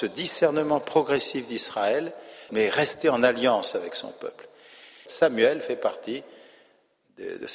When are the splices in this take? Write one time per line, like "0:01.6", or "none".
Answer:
0:02.5
0:05.1